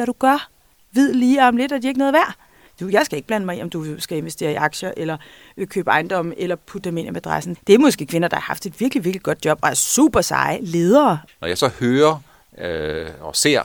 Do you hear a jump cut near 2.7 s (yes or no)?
yes